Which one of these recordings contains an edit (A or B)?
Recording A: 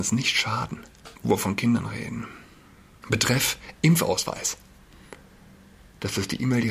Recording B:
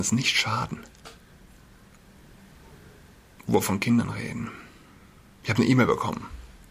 A